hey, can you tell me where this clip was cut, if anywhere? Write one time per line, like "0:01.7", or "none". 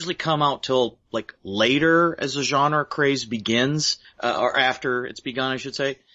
none